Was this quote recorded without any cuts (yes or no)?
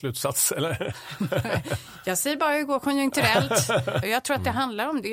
no